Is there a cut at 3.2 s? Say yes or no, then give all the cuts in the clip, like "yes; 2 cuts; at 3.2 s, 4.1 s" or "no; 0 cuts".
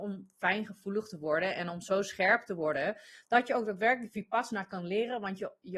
no; 0 cuts